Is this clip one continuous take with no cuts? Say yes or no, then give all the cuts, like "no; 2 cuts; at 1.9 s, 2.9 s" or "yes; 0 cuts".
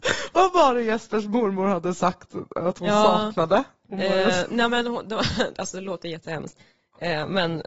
yes; 0 cuts